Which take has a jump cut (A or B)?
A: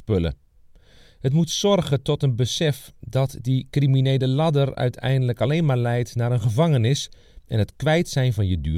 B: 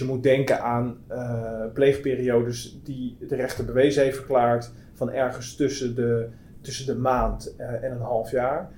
B